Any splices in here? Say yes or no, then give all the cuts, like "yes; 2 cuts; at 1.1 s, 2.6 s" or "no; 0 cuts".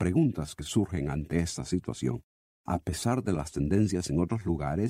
yes; 1 cut; at 2.5 s